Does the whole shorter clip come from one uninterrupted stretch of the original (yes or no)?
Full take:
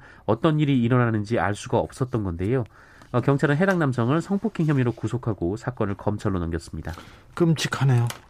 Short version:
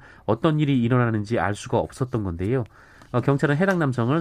yes